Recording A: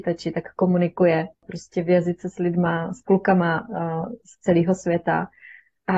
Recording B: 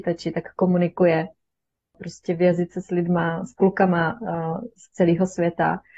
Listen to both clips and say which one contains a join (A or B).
A